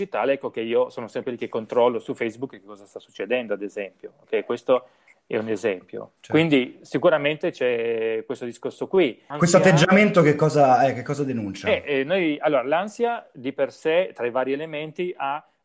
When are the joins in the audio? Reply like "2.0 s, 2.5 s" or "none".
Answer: 6.2 s, 9.3 s